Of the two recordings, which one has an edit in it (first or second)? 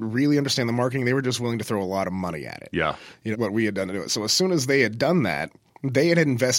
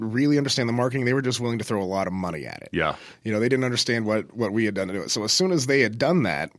first